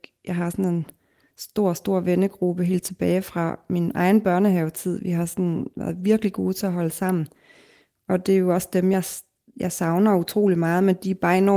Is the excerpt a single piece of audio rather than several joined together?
yes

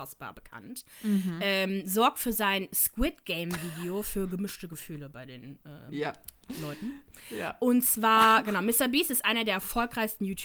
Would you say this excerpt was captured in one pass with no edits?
yes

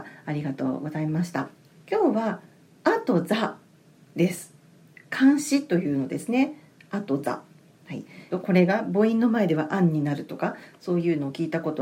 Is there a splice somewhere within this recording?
yes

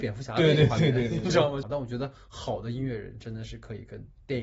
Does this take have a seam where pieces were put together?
yes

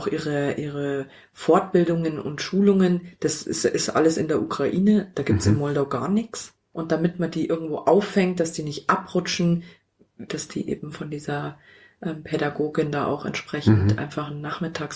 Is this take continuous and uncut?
no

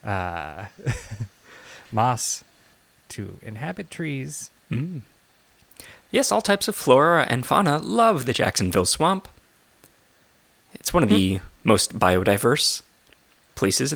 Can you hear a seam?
no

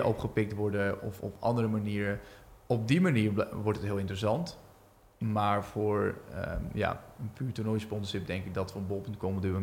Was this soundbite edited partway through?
no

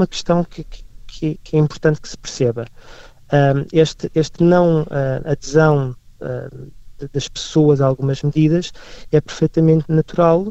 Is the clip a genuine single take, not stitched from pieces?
yes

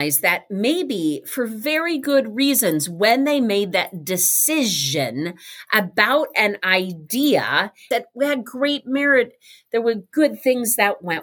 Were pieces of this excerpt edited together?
yes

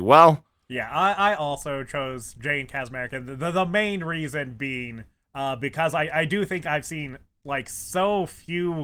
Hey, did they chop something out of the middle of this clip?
no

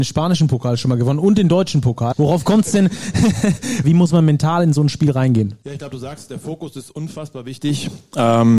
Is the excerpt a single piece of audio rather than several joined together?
no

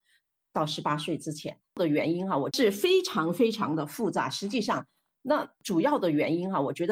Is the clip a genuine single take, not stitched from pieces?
no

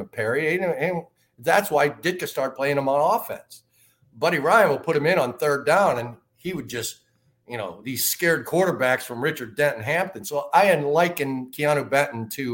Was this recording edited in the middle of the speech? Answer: no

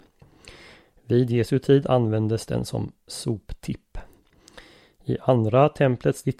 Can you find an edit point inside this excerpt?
no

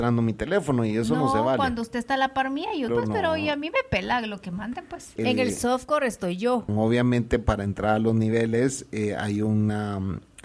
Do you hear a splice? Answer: yes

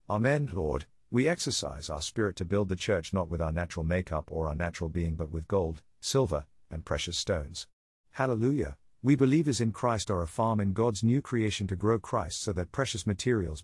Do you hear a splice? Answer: yes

